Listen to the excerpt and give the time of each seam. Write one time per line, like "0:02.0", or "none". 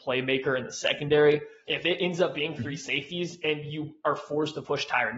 0:01.7